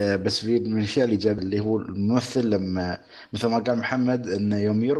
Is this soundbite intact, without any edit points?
no; 1 cut; at 1.4 s

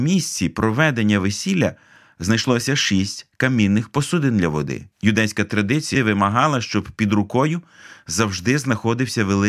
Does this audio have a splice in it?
yes; 2 cuts; at 4.9 s, 6.0 s

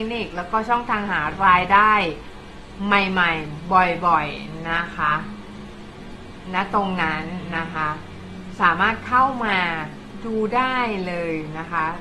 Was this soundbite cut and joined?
no; 0 cuts

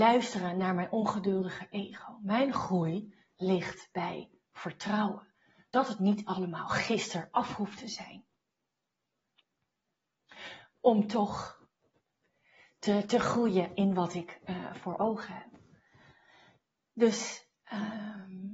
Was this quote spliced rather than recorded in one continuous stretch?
no; 0 cuts

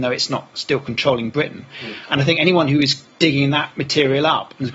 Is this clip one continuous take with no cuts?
yes; 0 cuts

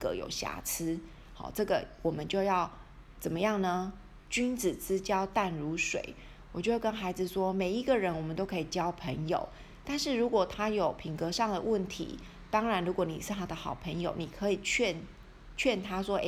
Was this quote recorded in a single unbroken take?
yes; 0 cuts

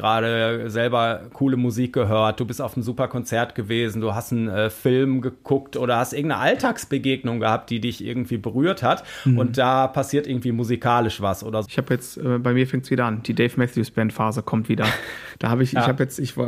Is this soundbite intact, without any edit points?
no; 2 cuts; at 11.7 s, 15.3 s

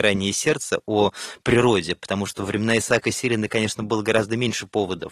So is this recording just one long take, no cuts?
yes; 0 cuts

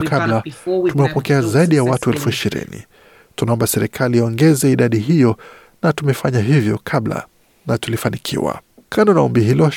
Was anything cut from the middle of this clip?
no; 0 cuts

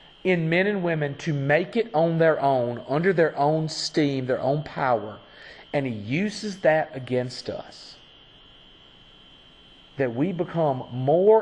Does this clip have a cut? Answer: no; 0 cuts

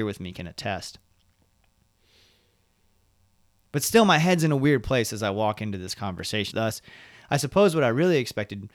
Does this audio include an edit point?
yes; 1 cut; at 6.5 s

